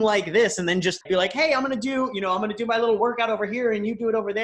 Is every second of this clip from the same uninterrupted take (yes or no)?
no